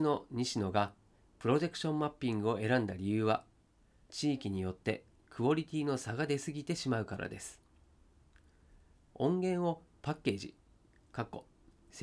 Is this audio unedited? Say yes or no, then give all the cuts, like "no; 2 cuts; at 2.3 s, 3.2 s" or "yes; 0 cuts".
no; 1 cut; at 4.0 s